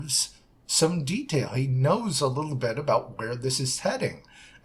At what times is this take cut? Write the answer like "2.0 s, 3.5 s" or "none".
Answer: none